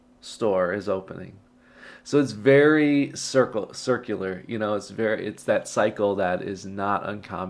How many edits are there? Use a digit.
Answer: 0